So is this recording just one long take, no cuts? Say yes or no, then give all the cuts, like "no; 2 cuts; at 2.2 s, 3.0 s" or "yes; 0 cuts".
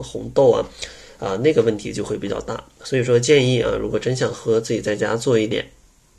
yes; 0 cuts